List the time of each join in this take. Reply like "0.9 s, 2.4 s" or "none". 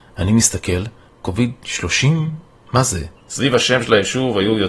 1.1 s, 3.2 s